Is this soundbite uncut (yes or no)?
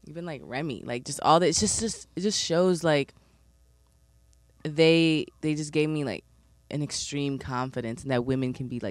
yes